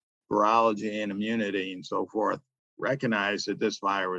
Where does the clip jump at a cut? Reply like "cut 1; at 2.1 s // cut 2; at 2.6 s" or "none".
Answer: none